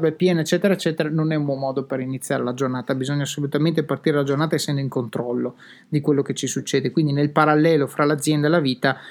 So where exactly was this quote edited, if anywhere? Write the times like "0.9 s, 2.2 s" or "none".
none